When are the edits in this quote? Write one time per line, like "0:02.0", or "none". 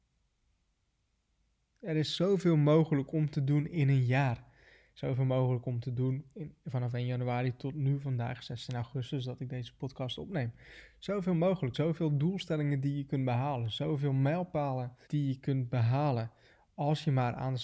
0:11.7
0:15.0